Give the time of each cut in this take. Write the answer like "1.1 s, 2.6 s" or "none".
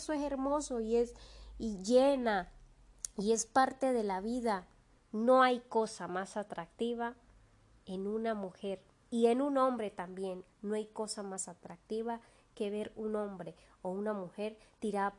5.0 s, 10.5 s